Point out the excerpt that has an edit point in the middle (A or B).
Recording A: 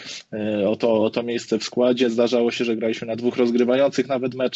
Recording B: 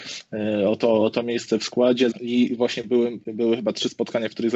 B